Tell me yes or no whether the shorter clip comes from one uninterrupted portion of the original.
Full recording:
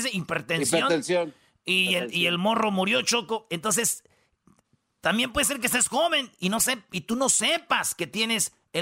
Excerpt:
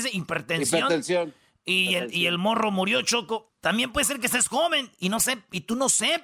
no